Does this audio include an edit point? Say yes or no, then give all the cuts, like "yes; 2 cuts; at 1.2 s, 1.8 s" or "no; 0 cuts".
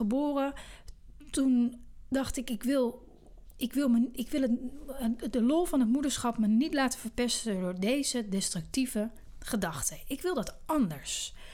no; 0 cuts